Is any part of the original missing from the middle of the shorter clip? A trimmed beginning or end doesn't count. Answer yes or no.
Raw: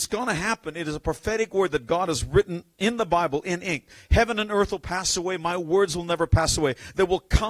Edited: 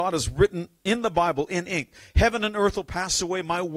no